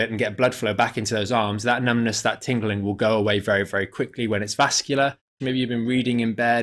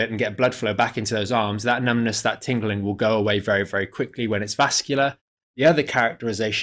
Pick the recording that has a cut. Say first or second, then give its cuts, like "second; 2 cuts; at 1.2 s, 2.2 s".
first; 1 cut; at 5.4 s